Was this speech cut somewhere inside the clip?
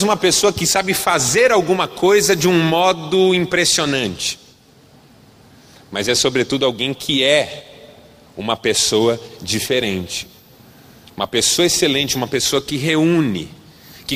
no; 0 cuts

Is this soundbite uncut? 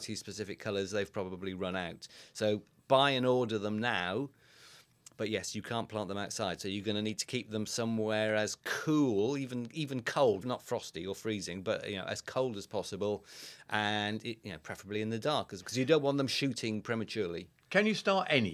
no; 2 cuts; at 10.4 s, 15.6 s

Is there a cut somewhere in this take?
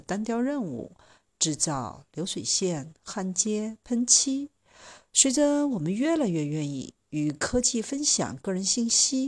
no; 0 cuts

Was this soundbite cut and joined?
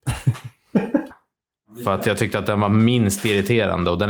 yes; 1 cut; at 1.1 s

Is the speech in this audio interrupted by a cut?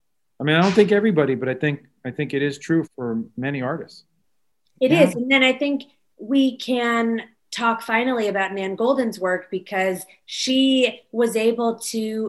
yes; 1 cut; at 2.8 s

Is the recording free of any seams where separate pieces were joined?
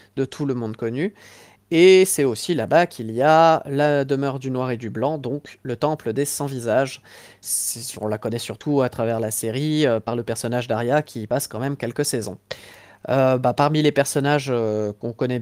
yes; 0 cuts

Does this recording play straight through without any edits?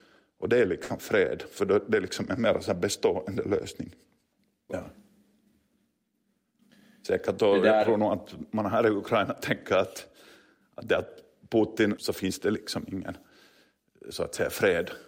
no; 2 cuts; at 4.7 s, 12.0 s

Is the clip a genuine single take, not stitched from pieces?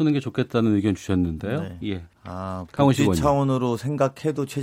no; 1 cut; at 2.1 s

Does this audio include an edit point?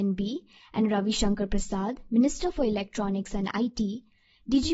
no; 0 cuts

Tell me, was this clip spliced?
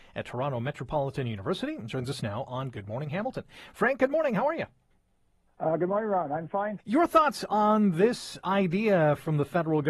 yes; 1 cut; at 6.8 s

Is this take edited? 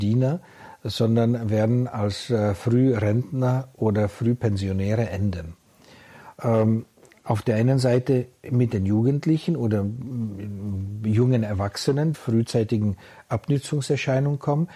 yes; 2 cuts; at 6.3 s, 12.1 s

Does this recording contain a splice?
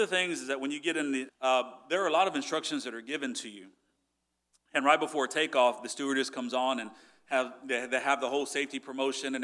yes; 1 cut; at 1.3 s

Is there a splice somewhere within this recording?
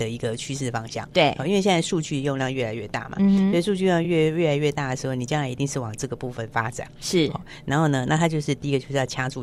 no; 0 cuts

